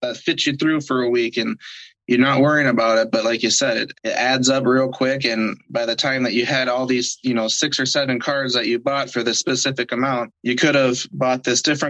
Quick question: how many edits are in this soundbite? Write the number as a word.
two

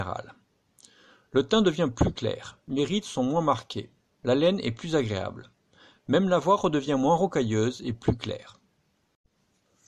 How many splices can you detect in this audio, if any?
one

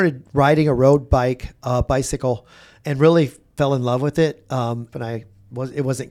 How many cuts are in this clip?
one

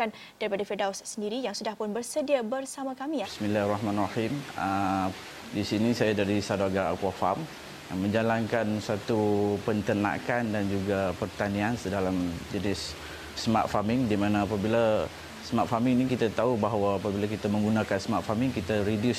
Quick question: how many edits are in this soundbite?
two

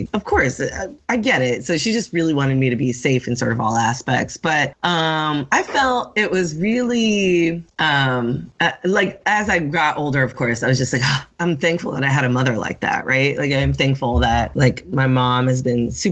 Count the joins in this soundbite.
zero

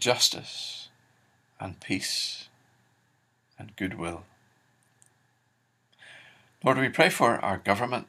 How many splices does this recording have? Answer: zero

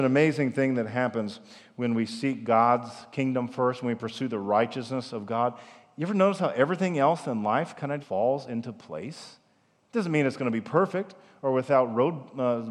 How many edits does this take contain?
one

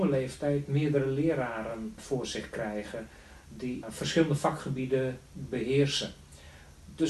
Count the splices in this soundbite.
two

